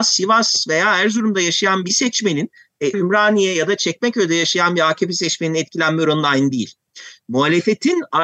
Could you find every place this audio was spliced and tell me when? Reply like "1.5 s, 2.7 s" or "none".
2.9 s